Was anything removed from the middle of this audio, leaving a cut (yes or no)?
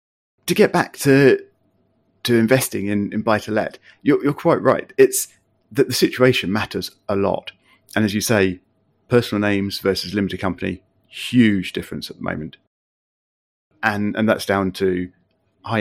no